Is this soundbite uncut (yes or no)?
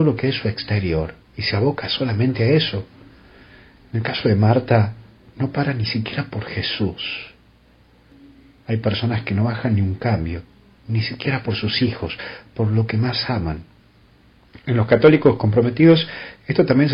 yes